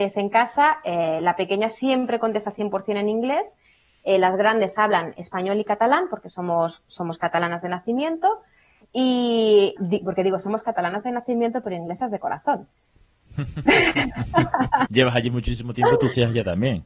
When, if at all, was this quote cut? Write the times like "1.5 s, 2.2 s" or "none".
9.8 s, 14.9 s

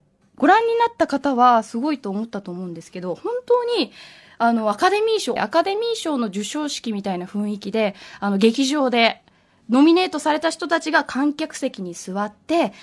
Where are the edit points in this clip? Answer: 5.4 s

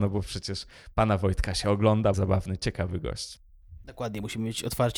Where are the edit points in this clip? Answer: 2.1 s

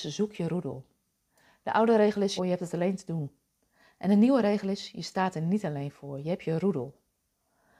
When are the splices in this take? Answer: 2.4 s

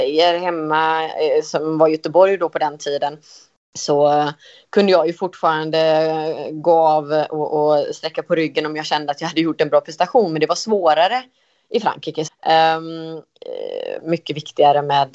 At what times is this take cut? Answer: 12.3 s, 14.0 s

